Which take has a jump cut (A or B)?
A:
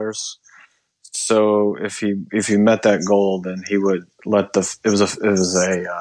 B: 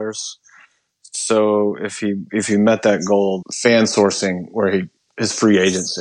B